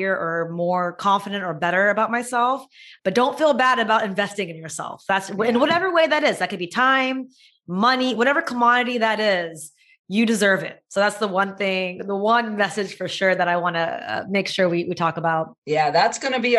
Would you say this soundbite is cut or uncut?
uncut